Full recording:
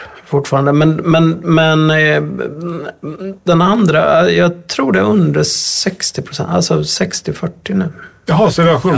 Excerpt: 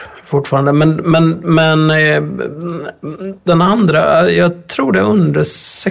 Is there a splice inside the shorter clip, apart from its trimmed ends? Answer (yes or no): no